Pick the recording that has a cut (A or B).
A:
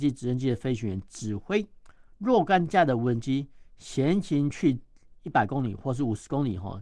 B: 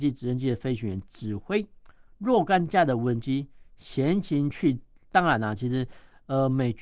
B